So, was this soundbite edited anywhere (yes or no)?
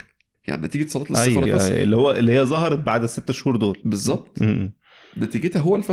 yes